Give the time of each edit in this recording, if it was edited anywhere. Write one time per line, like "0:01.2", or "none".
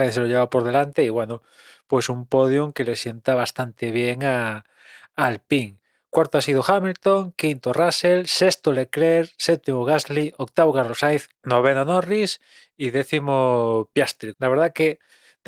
0:11.3
0:14.3